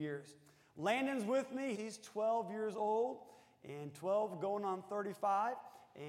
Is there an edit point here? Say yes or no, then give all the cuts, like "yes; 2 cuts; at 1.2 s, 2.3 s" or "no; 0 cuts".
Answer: yes; 1 cut; at 1.7 s